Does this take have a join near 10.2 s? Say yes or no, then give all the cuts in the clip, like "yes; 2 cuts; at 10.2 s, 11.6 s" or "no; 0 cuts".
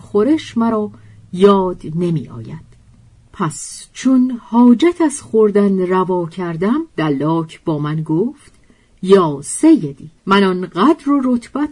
yes; 2 cuts; at 6.9 s, 10.2 s